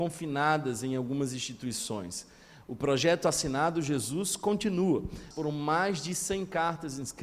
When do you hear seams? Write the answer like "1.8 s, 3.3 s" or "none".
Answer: 5.3 s